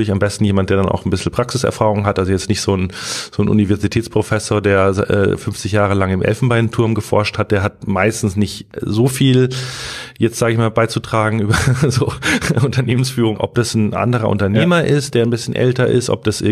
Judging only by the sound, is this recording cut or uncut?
cut